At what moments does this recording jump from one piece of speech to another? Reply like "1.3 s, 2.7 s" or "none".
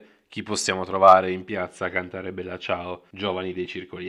none